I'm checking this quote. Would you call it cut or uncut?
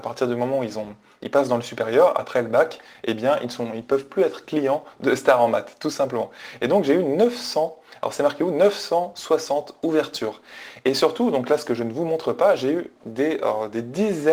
uncut